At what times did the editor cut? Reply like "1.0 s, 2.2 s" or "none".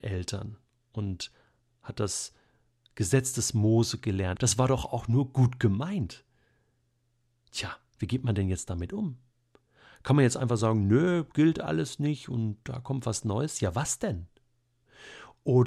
4.4 s